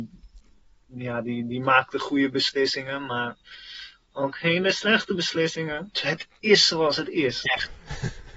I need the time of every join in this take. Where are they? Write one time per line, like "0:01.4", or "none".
0:05.9
0:07.5